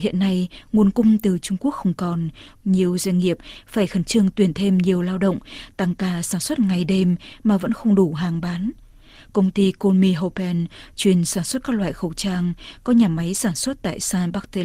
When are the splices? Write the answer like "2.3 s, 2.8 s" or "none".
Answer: 2.6 s